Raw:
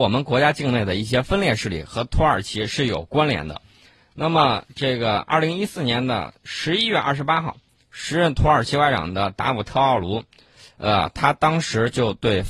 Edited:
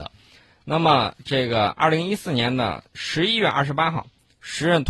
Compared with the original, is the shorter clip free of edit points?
yes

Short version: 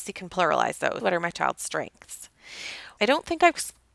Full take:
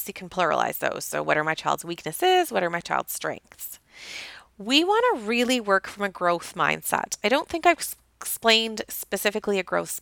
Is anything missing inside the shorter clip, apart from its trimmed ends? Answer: yes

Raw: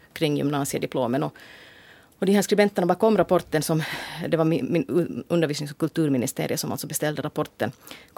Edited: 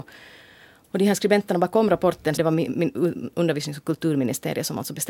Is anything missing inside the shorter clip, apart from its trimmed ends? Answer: yes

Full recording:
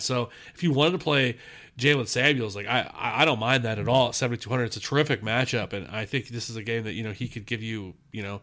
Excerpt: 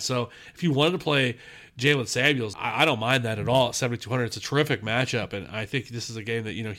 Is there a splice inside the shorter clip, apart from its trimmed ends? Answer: yes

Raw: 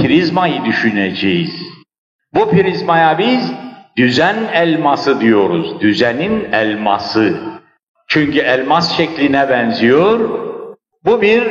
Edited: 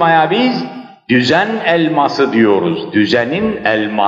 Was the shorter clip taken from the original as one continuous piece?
yes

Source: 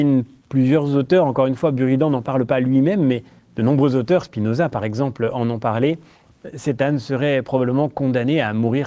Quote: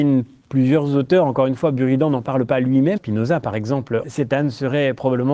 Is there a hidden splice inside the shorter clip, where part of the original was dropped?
yes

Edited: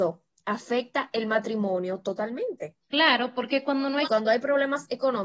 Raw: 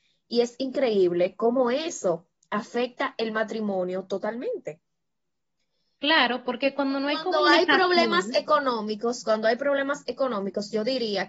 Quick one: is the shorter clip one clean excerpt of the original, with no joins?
no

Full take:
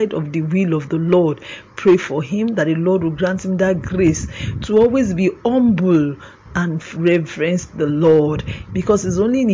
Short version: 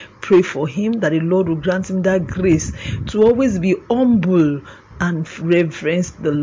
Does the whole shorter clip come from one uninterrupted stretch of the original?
yes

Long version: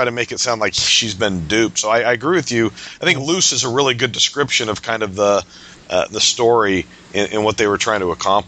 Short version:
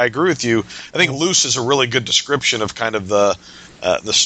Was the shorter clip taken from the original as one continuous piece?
yes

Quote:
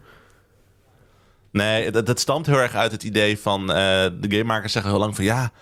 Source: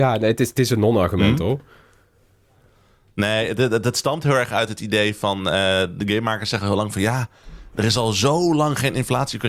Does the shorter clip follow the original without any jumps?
no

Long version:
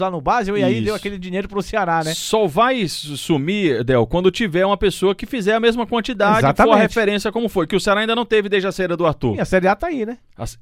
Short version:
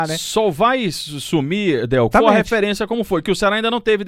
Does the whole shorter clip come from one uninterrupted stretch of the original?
no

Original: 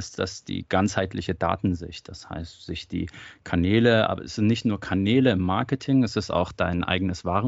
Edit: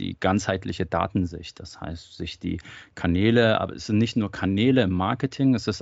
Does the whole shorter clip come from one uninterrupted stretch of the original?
yes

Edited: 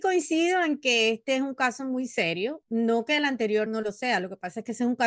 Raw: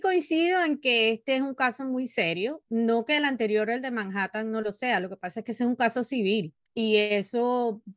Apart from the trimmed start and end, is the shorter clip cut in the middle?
yes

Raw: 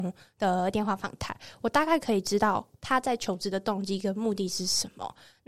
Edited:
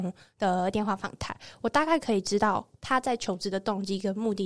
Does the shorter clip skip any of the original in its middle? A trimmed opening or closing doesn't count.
no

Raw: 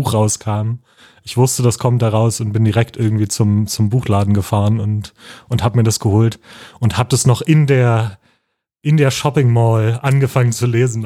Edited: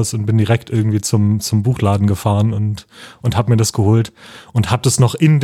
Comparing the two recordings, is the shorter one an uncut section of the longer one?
yes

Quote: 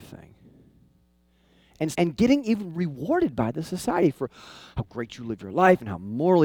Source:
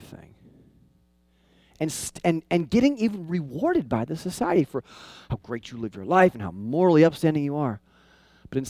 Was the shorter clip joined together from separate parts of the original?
yes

